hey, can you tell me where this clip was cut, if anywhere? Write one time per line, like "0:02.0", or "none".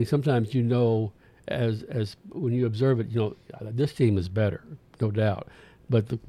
none

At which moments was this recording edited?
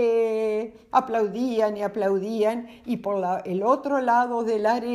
0:00.9

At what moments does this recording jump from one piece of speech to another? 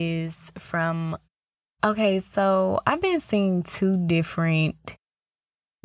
none

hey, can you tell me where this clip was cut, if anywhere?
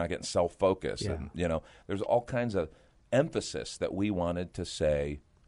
0:02.1

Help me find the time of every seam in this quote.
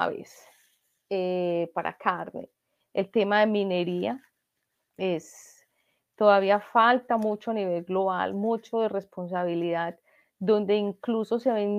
0:02.8

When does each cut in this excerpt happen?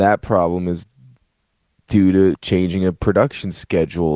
0:02.3

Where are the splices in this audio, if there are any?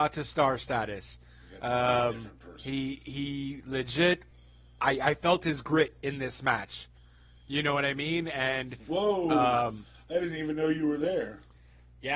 none

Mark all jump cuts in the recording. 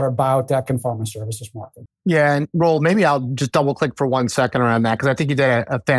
0:01.9

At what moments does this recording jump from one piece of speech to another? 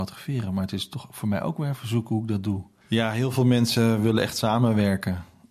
0:02.8

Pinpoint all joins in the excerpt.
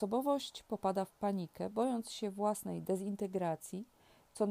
none

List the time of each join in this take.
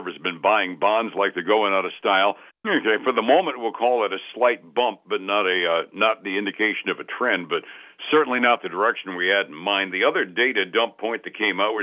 0:02.5

